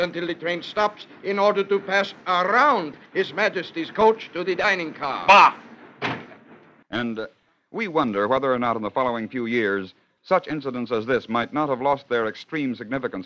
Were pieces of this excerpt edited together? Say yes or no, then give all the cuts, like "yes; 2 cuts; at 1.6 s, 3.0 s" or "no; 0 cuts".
yes; 1 cut; at 6.8 s